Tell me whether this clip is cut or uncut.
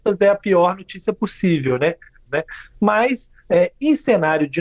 cut